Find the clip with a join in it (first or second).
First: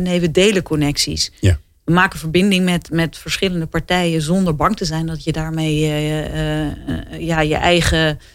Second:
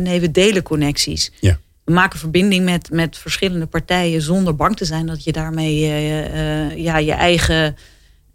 second